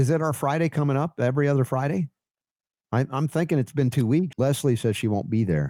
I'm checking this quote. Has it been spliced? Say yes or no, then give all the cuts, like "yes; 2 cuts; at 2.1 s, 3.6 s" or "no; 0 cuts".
yes; 1 cut; at 4.3 s